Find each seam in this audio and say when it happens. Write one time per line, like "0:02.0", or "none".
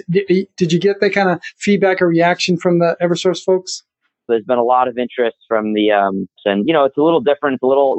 0:04.3
0:06.4